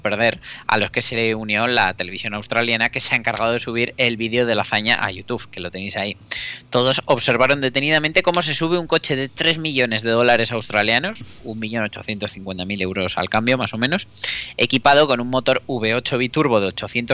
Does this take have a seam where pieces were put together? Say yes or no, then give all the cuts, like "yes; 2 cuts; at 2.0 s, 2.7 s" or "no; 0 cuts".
no; 0 cuts